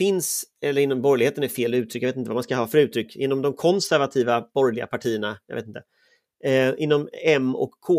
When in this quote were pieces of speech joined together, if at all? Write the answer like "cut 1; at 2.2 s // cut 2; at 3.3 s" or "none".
none

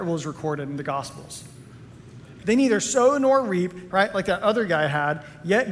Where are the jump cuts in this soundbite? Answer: cut 1; at 2.4 s // cut 2; at 3.9 s

